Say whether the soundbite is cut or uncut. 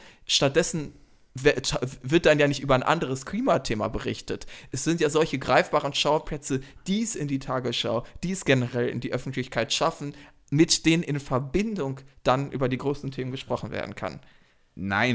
uncut